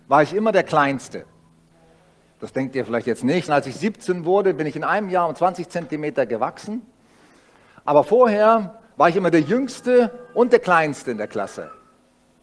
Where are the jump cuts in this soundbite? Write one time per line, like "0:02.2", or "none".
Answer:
0:03.5